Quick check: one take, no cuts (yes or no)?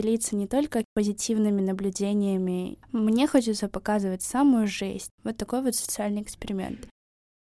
no